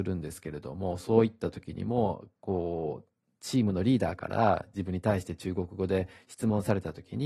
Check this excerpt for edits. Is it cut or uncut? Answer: uncut